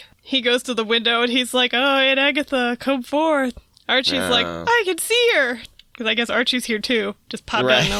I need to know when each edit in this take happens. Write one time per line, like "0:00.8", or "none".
none